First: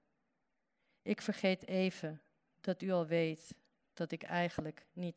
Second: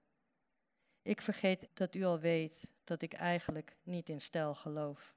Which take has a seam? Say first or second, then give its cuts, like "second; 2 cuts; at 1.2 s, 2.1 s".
second; 2 cuts; at 1.7 s, 2.8 s